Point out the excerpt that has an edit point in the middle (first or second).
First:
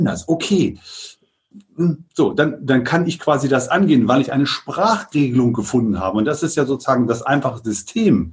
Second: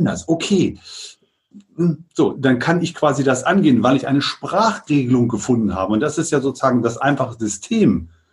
second